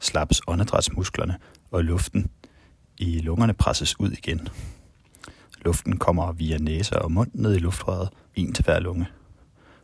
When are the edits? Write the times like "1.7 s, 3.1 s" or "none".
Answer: 8.3 s